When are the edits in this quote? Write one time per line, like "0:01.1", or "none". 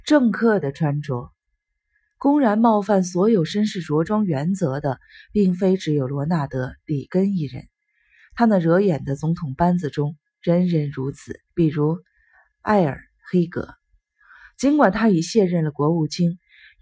0:11.5